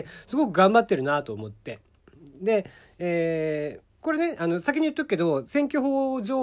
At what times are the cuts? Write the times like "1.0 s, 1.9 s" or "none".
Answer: 3.9 s